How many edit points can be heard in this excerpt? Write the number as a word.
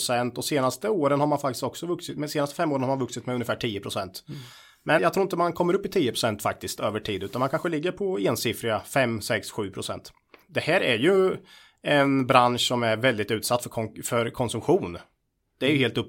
two